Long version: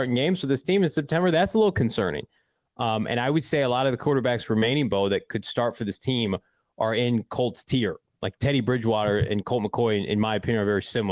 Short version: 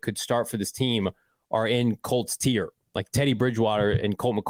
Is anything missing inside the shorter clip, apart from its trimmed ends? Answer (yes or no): no